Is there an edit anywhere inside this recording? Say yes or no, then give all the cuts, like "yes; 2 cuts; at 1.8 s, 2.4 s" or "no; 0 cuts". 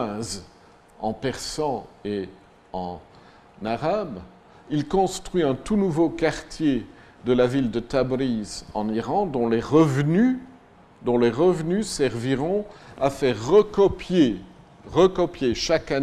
no; 0 cuts